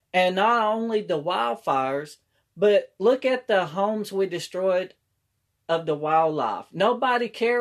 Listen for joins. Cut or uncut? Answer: uncut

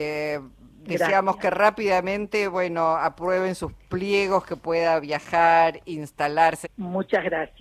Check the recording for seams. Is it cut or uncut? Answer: cut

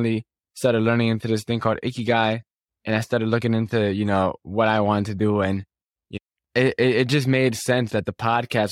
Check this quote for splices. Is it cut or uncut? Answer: uncut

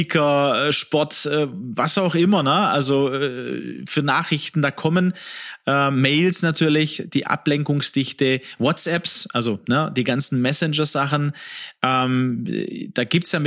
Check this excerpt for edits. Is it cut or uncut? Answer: uncut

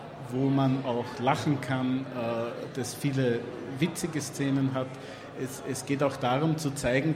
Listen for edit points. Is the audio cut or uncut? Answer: uncut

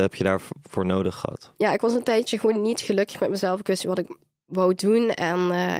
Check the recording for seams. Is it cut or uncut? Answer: cut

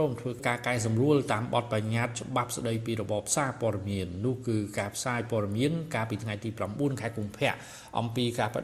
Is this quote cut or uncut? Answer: uncut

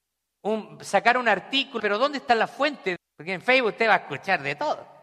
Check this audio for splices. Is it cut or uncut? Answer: cut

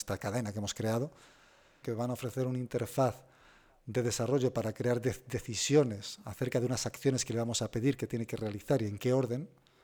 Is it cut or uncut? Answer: cut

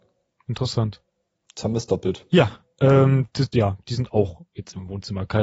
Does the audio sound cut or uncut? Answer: cut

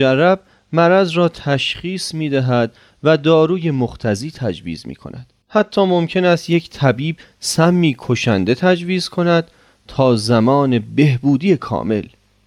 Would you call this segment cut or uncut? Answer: cut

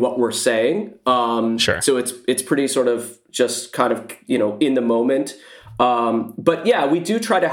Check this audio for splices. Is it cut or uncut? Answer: uncut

